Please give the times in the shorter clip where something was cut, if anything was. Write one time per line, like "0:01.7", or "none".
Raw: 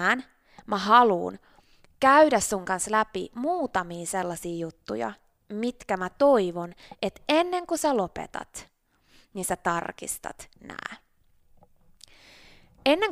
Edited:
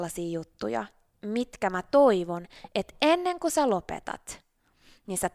none

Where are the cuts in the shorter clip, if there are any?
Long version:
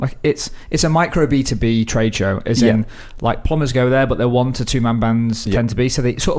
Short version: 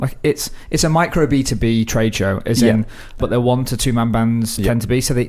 0:03.2

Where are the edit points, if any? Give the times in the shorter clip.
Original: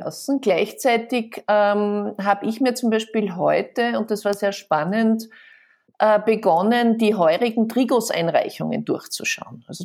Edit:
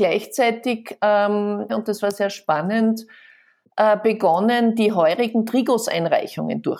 0:01.7

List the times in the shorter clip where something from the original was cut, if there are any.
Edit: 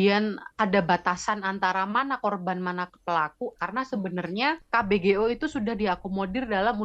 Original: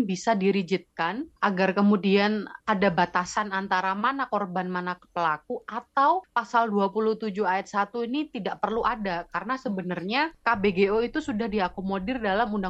0:03.6

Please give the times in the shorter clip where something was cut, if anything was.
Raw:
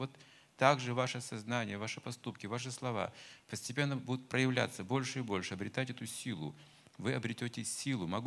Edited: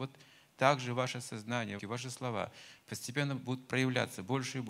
0:01.8

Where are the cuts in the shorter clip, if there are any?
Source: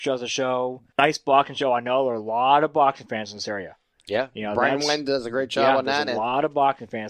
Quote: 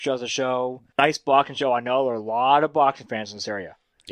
none

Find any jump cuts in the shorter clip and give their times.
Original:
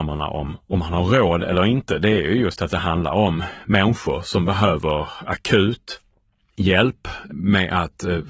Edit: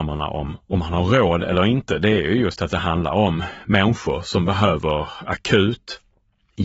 none

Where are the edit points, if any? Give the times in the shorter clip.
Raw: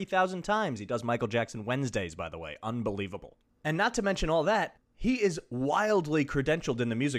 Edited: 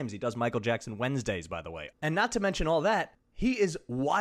0:01.9

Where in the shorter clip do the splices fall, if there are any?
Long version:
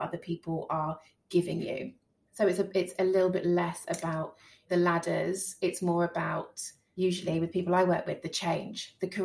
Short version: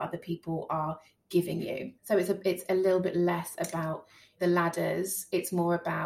0:02.0

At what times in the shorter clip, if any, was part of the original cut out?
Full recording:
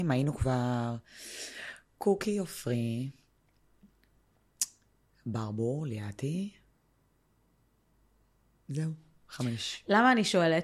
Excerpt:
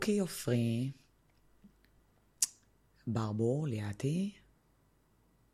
none

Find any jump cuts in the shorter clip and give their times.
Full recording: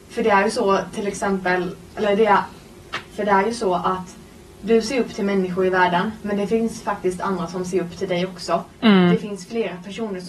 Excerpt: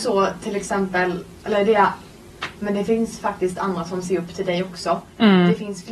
0:02.6

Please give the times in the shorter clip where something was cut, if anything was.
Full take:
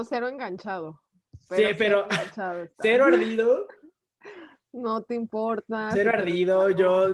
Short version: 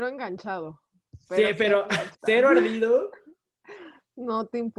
0:02.1

